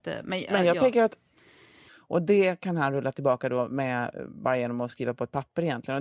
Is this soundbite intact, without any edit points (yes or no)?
no